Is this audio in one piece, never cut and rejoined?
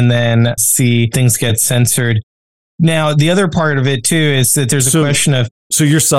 yes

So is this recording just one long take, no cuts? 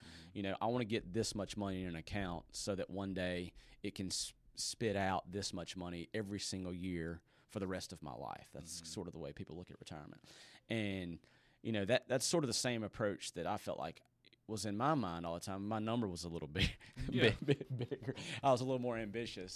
no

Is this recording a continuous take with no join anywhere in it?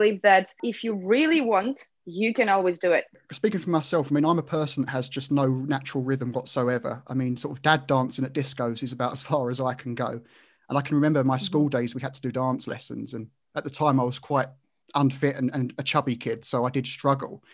yes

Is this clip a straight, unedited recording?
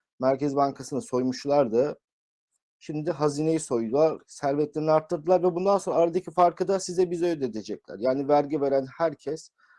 yes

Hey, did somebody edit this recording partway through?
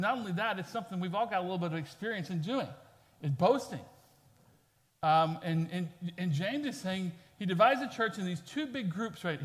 no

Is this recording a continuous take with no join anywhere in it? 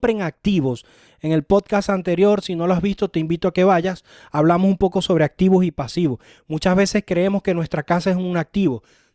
yes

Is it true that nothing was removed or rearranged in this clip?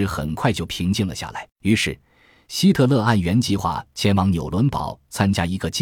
no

